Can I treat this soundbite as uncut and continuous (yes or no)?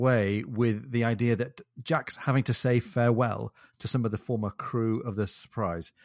yes